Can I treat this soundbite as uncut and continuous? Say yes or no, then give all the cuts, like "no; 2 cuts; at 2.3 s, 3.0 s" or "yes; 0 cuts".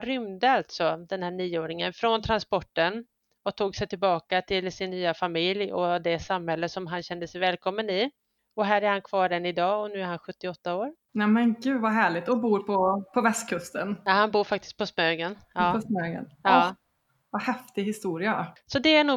yes; 0 cuts